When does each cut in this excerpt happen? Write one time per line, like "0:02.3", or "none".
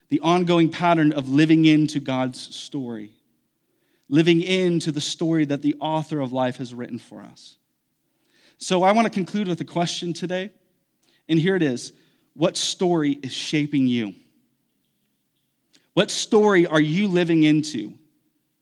none